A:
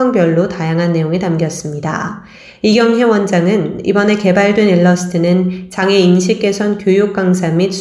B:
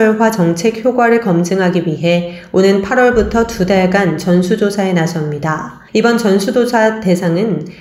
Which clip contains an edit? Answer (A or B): B